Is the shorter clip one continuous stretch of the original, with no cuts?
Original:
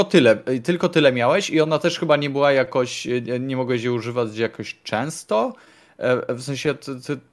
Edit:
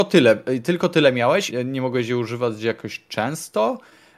no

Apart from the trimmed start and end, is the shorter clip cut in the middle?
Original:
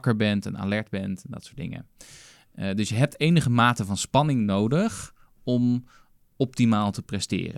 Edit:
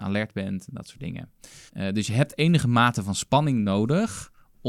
yes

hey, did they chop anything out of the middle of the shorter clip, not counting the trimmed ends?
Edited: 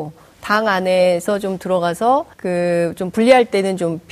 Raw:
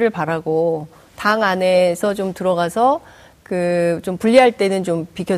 yes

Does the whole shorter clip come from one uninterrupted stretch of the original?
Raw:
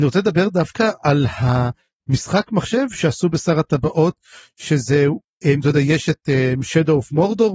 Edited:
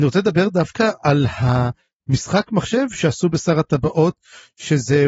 yes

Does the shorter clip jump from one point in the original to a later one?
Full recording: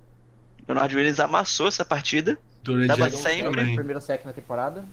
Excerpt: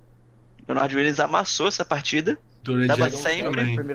no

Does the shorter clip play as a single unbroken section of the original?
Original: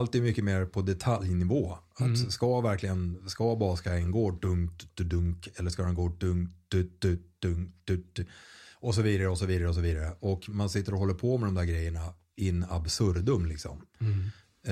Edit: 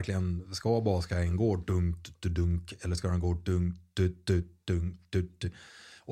yes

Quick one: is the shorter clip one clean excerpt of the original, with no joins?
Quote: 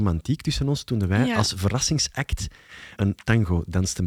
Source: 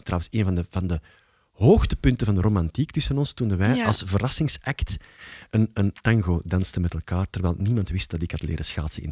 no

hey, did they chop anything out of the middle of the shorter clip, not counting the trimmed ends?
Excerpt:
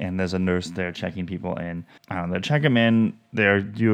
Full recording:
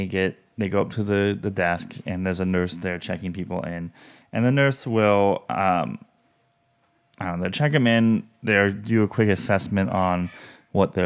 yes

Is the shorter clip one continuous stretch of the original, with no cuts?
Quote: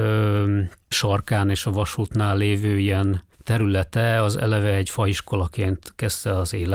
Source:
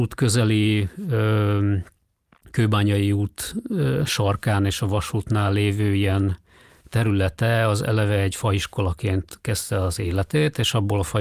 no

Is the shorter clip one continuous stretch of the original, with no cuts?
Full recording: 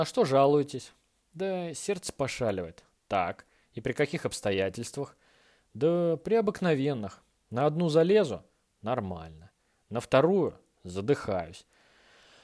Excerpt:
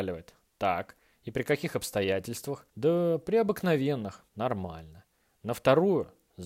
no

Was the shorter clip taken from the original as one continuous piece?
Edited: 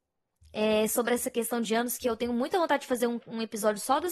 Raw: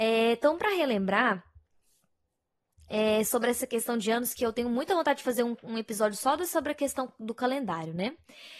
yes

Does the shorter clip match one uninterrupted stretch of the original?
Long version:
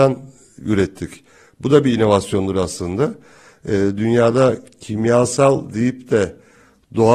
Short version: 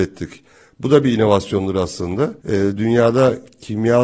no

